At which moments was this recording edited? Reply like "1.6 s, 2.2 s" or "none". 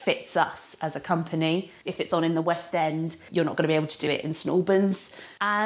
1.8 s